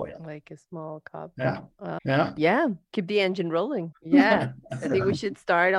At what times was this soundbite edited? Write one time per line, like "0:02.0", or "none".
0:02.0
0:03.9